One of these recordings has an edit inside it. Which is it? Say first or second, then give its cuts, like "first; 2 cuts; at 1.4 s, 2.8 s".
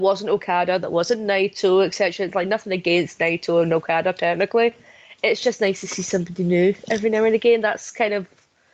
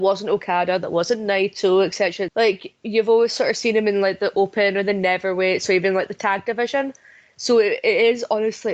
second; 1 cut; at 2.3 s